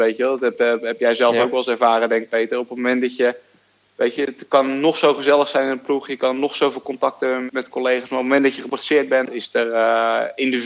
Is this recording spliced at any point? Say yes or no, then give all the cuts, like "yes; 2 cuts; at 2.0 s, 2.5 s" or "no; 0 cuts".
yes; 2 cuts; at 7.5 s, 9.3 s